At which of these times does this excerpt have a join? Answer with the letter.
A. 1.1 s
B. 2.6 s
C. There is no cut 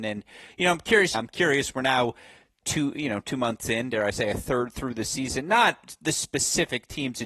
A